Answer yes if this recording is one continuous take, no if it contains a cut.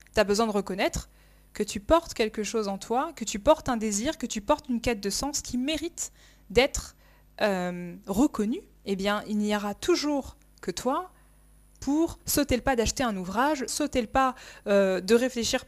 no